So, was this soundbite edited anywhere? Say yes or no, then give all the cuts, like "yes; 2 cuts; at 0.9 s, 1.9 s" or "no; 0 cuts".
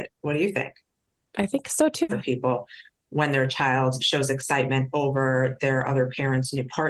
yes; 2 cuts; at 2.1 s, 4.0 s